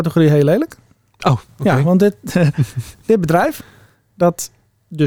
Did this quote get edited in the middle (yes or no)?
no